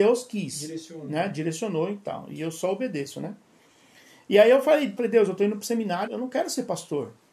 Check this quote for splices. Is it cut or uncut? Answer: cut